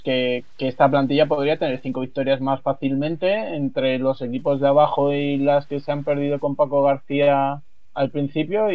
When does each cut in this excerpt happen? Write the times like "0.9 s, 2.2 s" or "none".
none